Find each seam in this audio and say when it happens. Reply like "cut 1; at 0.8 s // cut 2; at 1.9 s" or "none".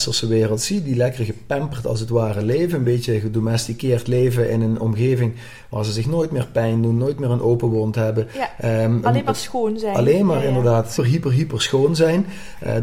cut 1; at 11.0 s